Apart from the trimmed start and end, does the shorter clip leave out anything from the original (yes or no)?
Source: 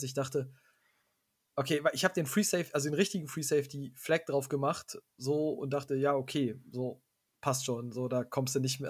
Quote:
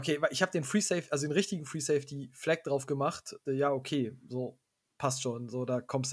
yes